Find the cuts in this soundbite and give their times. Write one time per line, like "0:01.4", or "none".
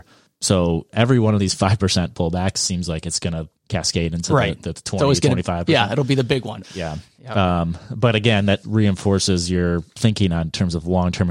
0:03.6
0:06.6
0:08.6